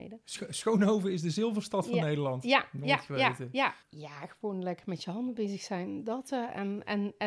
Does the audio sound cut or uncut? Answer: cut